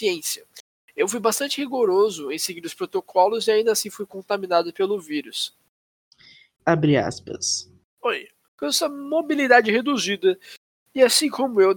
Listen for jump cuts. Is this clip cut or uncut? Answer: cut